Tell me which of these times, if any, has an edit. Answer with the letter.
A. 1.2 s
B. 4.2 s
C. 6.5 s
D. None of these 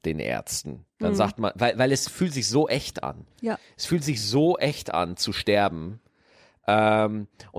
D